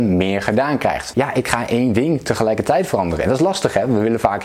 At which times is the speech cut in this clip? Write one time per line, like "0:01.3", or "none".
0:01.1